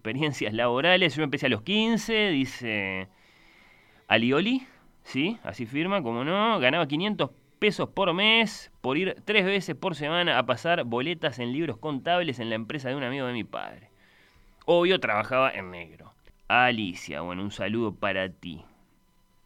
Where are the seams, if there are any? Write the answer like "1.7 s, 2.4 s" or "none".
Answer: 16.3 s